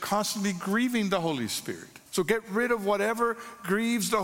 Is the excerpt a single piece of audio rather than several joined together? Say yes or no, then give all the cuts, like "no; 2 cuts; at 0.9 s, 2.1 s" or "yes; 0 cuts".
no; 1 cut; at 2.1 s